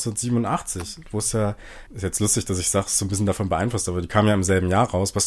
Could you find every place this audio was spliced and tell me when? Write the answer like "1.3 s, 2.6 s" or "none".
1.9 s